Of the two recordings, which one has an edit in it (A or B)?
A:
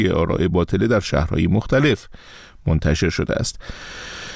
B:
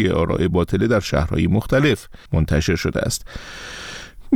B